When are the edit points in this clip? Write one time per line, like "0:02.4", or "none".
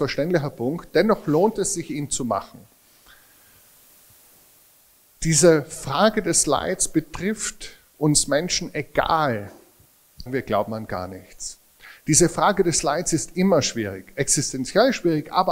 0:10.3